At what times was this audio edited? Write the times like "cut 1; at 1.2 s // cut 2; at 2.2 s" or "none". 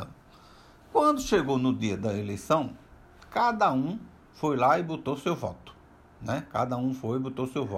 none

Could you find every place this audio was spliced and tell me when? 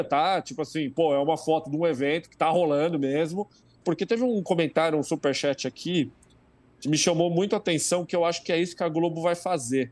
cut 1; at 3.8 s

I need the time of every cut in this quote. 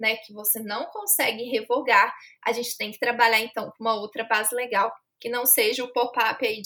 none

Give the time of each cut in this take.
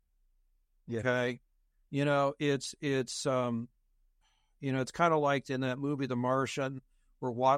none

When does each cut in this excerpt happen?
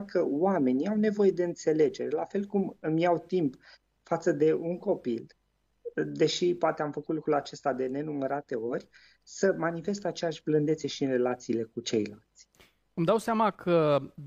none

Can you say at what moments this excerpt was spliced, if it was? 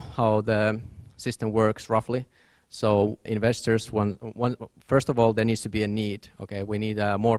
cut 1; at 3.3 s

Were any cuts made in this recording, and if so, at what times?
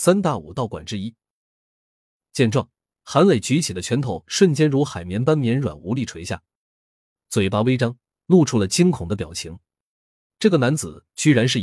cut 1; at 10.3 s

